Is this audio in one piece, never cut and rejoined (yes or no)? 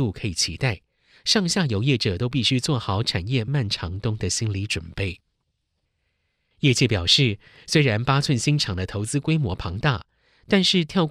no